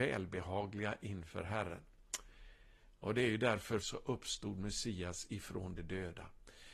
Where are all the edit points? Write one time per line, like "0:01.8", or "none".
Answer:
0:03.8